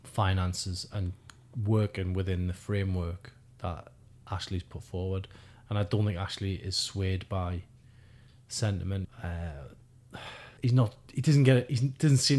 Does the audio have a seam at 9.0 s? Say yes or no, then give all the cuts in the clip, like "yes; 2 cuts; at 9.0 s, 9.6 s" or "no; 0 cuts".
yes; 2 cuts; at 9.0 s, 10.6 s